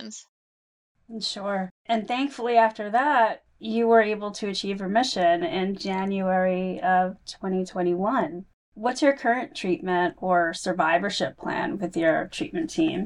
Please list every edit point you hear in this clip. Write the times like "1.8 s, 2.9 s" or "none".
none

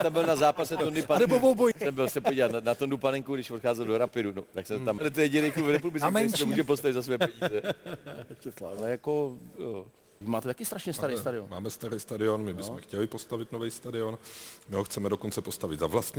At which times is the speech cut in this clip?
1.7 s, 5.0 s, 10.2 s

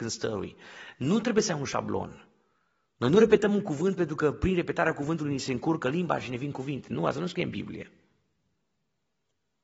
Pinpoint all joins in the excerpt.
none

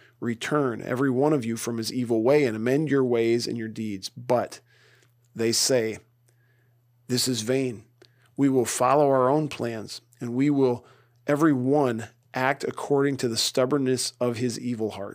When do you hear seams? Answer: none

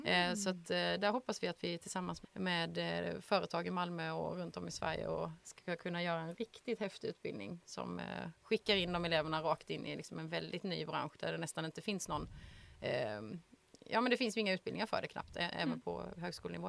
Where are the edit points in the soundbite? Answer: 2.2 s

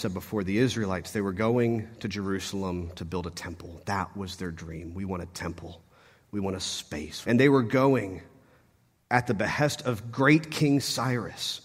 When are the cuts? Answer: 7.2 s

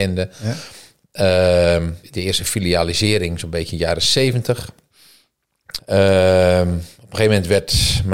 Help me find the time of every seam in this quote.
2.0 s, 5.8 s

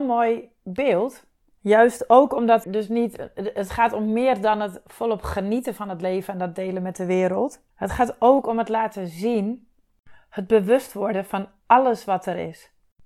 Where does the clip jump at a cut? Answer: 2.6 s, 7.7 s

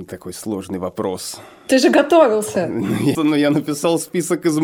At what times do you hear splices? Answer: 3.1 s

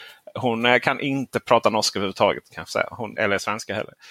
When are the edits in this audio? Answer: 3.2 s

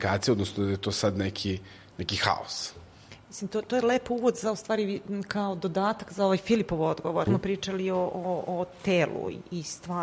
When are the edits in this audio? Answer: 7.3 s

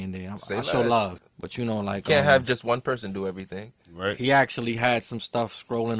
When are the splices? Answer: 1.2 s

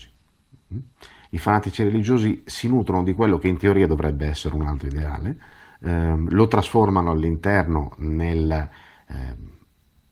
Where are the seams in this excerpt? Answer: none

